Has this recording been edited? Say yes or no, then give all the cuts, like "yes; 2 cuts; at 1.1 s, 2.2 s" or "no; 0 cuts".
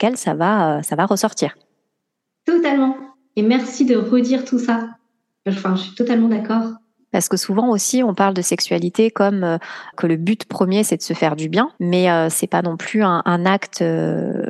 yes; 2 cuts; at 9.9 s, 11.8 s